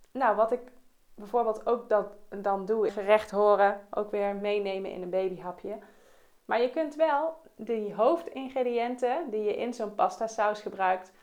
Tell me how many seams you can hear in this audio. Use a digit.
2